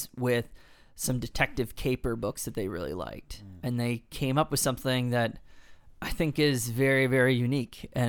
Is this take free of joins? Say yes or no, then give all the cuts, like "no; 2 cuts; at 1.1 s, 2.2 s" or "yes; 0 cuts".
yes; 0 cuts